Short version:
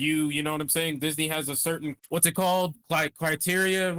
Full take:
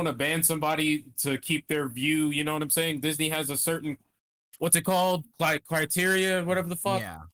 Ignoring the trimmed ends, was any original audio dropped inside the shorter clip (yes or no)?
yes